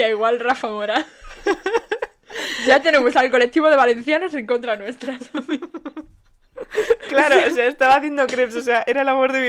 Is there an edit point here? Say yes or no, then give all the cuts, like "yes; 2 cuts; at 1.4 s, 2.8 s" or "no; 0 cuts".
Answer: yes; 1 cut; at 7.0 s